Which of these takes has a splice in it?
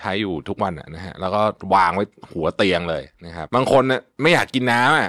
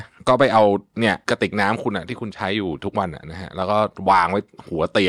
first; 1 cut; at 3.5 s

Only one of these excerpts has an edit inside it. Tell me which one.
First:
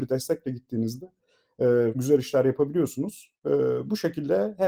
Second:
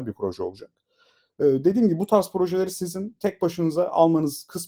first; 1 cut; at 1.9 s

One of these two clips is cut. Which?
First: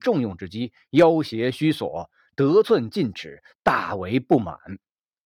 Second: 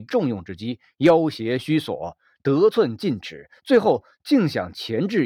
first; 1 cut; at 3.5 s

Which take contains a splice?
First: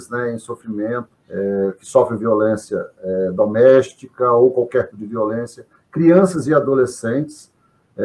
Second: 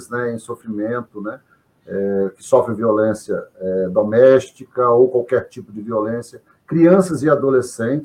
first; 2 cuts; at 1.1 s, 4.9 s

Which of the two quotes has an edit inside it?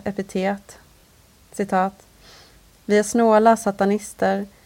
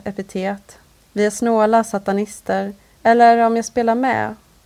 second; 2 cuts; at 1.0 s, 2.8 s

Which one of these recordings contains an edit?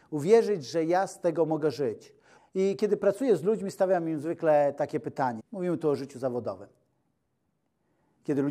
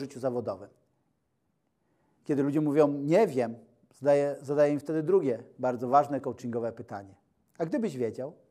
first; 2 cuts; at 2.4 s, 5.4 s

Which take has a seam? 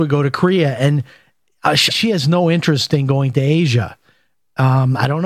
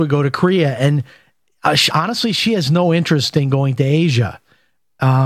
first; 1 cut; at 1.9 s

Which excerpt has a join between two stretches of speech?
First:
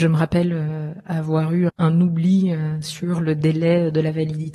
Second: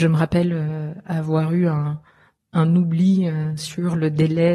first; 1 cut; at 1.7 s

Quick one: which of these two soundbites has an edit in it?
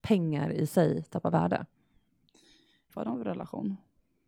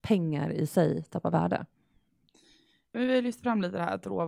first; 1 cut; at 2.9 s

